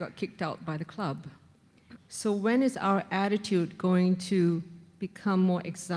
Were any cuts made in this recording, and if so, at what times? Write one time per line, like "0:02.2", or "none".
0:02.0